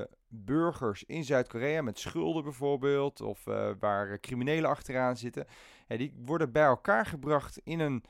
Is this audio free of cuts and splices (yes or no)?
yes